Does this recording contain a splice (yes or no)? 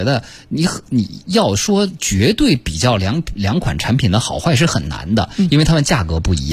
no